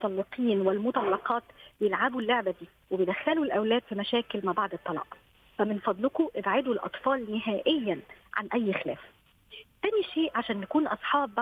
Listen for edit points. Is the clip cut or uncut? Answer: uncut